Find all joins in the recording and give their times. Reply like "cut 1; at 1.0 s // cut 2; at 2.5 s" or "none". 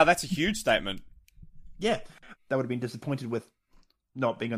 cut 1; at 2.3 s